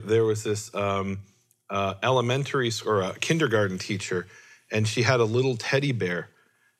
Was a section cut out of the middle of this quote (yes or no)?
no